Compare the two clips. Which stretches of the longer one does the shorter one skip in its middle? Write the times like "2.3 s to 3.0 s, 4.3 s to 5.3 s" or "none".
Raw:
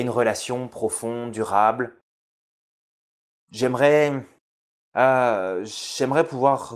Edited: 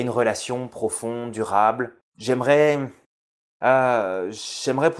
2.1 s to 3.4 s